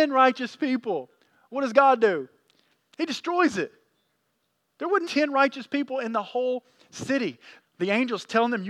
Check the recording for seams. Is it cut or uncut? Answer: cut